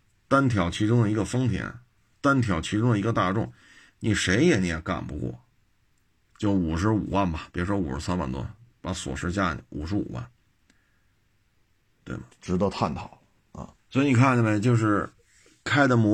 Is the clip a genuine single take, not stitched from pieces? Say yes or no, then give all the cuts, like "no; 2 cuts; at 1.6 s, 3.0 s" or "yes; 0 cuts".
no; 2 cuts; at 12.3 s, 13.8 s